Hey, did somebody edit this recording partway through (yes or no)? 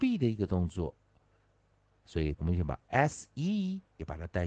yes